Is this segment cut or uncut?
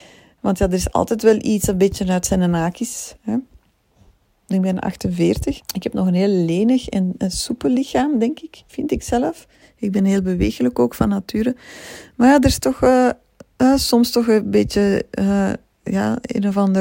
cut